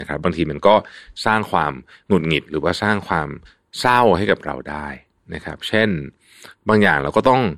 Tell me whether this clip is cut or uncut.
uncut